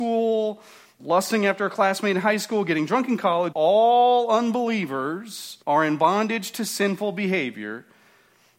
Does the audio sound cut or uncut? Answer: cut